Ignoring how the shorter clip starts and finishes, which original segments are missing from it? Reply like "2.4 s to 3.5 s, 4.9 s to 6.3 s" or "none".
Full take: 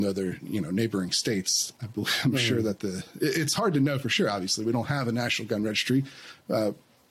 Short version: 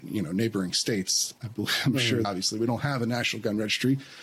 2.6 s to 4.3 s